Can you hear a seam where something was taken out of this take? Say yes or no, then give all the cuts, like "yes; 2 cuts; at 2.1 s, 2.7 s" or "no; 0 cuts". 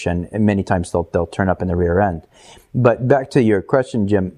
no; 0 cuts